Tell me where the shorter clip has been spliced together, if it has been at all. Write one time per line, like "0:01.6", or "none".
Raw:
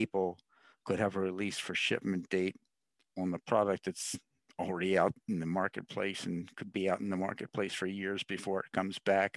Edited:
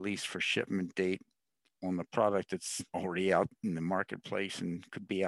0:02.9